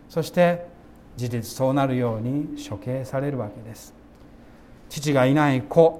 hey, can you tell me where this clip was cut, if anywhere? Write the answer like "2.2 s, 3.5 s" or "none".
1.2 s